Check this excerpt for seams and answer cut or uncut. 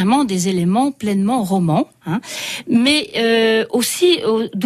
uncut